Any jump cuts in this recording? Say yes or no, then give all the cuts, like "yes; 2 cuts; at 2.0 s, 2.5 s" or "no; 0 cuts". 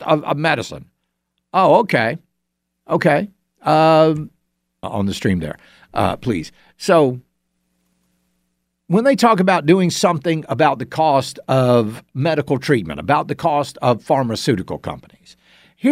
yes; 1 cut; at 4.8 s